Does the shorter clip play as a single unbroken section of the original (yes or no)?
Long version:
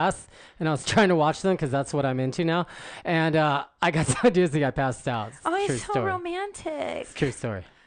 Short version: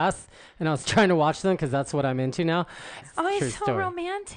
no